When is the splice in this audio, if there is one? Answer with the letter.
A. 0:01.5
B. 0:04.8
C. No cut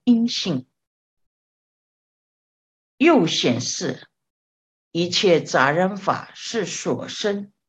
B